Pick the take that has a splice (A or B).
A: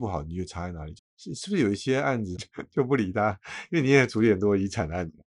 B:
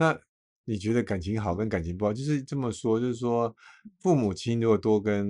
A